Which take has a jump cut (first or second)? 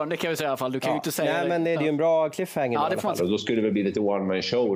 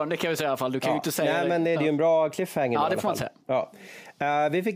first